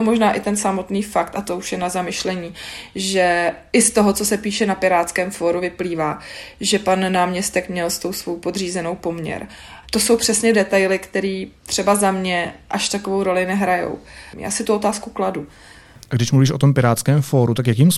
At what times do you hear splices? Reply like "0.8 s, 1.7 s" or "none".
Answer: 9.8 s, 14.3 s